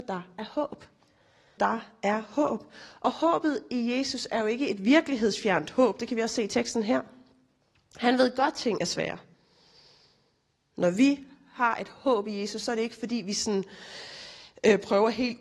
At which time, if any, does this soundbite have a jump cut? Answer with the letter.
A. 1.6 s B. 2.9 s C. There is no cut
A